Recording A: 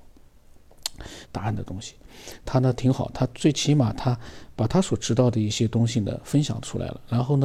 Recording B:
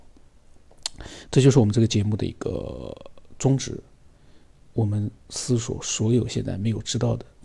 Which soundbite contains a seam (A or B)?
A